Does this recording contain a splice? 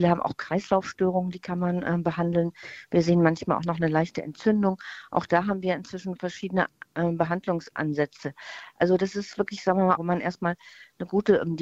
yes; 1 cut; at 10.0 s

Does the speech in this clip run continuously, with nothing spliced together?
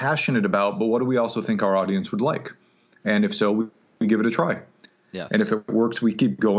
yes; 0 cuts

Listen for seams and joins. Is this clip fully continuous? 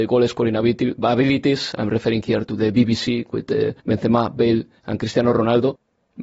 no; 1 cut; at 3.8 s

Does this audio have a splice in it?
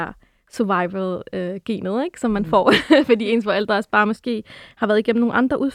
no; 0 cuts

